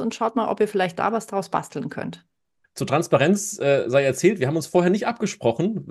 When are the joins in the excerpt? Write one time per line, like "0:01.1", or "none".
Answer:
0:02.6